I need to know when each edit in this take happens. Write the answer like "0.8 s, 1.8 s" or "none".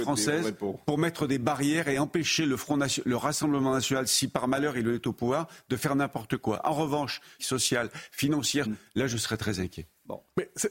7.4 s, 8.6 s